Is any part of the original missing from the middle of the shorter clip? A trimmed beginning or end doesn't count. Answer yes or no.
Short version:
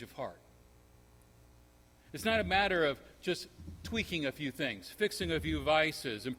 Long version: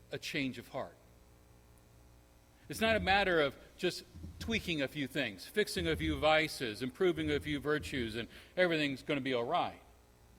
no